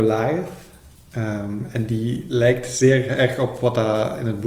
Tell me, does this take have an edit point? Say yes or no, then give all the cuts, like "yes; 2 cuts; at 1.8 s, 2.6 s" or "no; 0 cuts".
no; 0 cuts